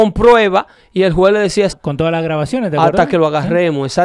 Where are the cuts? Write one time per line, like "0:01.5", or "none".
0:01.7